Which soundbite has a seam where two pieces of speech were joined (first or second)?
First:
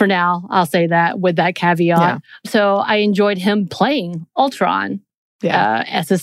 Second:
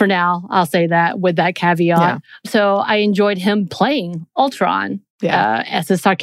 second